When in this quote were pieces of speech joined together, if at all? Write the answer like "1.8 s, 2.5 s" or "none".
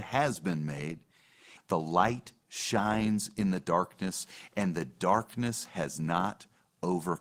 1.6 s